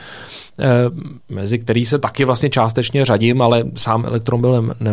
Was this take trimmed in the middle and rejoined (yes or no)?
yes